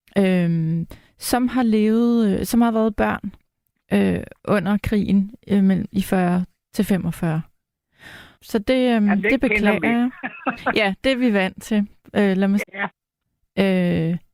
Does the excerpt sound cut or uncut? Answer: cut